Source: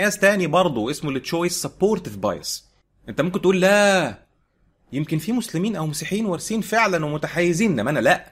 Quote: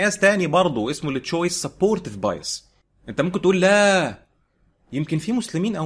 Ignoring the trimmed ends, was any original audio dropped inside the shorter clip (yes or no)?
no